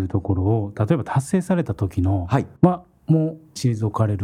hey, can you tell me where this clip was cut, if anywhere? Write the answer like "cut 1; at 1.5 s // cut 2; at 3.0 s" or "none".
cut 1; at 2.6 s